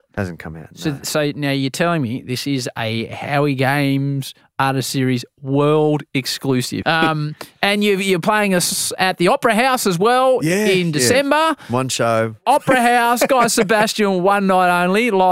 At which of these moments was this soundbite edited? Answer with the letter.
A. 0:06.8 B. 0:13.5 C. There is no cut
A